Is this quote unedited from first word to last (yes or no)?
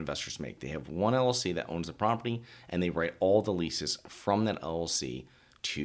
yes